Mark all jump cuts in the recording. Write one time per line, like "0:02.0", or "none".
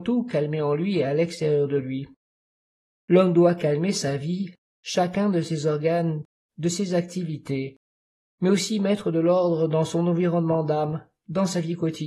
0:06.5